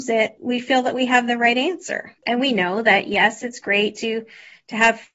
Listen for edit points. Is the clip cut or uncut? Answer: cut